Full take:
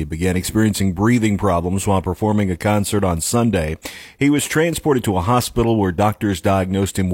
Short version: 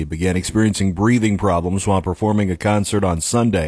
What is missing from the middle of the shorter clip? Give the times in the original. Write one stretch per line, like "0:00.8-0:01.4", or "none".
none